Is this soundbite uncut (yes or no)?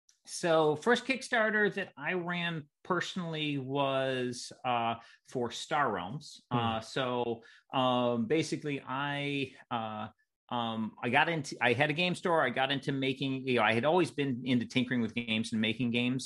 yes